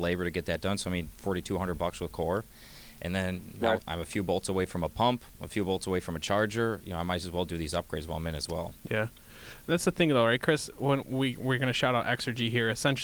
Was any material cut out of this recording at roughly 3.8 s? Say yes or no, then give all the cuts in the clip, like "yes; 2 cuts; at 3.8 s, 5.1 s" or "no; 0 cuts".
yes; 2 cuts; at 1.1 s, 3.8 s